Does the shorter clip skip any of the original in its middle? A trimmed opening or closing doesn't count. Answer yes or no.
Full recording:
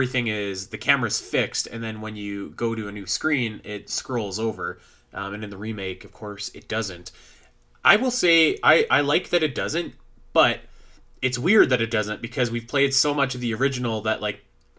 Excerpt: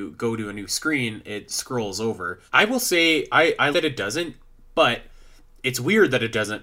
yes